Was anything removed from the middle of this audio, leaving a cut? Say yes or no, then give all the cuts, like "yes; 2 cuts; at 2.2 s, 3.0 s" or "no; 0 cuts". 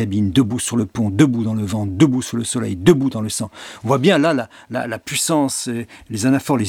no; 0 cuts